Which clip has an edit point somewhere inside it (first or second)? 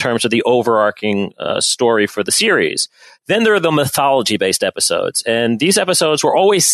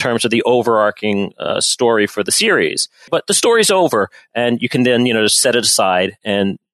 second